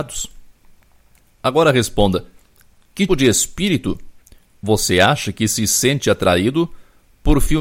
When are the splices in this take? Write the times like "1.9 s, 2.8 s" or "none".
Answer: 3.1 s